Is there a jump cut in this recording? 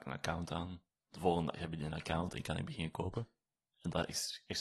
yes; 1 cut; at 3.7 s

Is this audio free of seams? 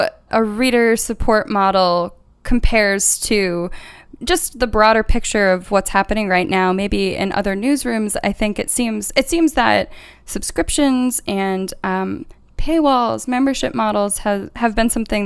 yes; 0 cuts

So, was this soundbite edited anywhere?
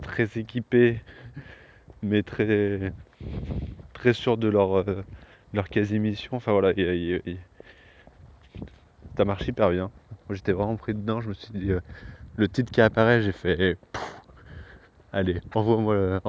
yes; 1 cut; at 12.3 s

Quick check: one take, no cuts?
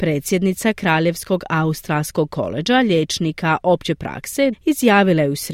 no; 1 cut; at 4.5 s

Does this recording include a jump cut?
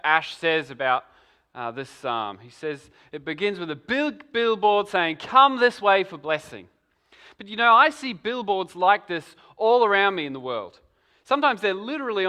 no; 0 cuts

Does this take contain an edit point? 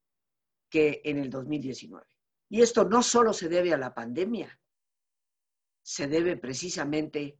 yes; 1 cut; at 2.4 s

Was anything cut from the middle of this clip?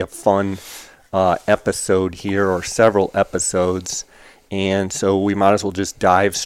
no; 0 cuts

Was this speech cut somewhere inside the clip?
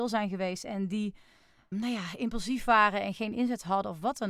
yes; 1 cut; at 1.7 s

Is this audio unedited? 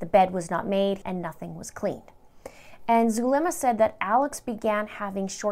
no; 1 cut; at 1.0 s

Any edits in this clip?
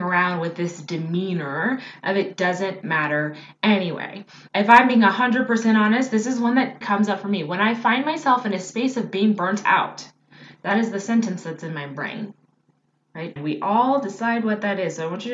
yes; 3 cuts; at 4.5 s, 6.8 s, 13.4 s

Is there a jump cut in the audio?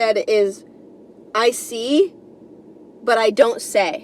no; 0 cuts

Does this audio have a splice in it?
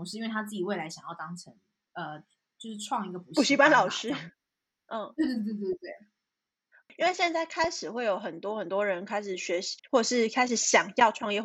yes; 2 cuts; at 5.3 s, 9.8 s

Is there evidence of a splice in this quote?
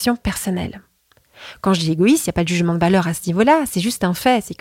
no; 0 cuts

